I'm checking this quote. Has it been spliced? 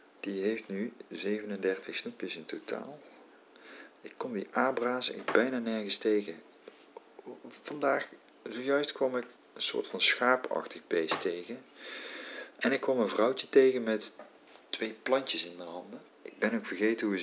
yes; 2 cuts; at 14.6 s, 16.1 s

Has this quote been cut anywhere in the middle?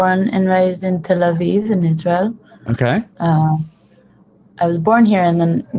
no; 0 cuts

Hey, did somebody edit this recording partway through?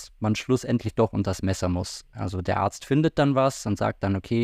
no; 0 cuts

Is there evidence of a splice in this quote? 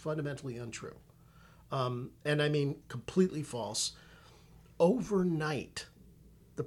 yes; 1 cut; at 2.8 s

